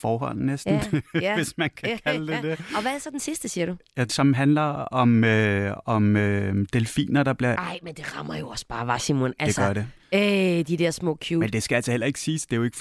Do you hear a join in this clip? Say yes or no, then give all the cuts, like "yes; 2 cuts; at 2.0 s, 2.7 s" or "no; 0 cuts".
yes; 2 cuts; at 4.1 s, 7.6 s